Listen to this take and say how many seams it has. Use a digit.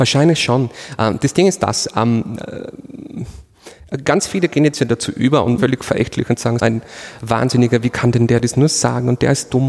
2